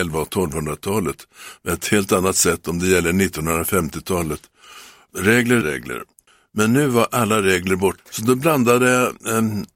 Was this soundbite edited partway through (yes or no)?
yes